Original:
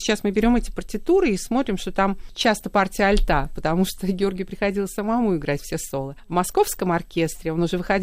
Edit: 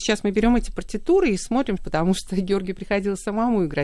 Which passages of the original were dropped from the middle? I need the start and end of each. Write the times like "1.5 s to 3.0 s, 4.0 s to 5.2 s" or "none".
1.8 s to 3.5 s